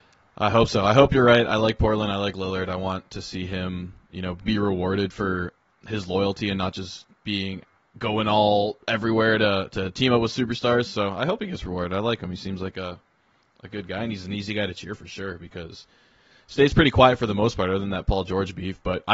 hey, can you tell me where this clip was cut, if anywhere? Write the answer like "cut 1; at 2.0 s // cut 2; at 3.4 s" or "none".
cut 1; at 15.0 s